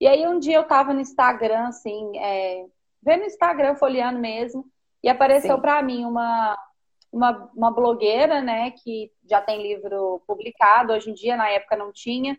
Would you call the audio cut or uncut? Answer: uncut